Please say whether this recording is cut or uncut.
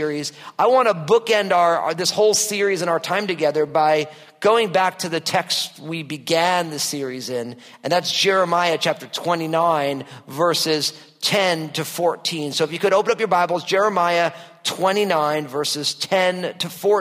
uncut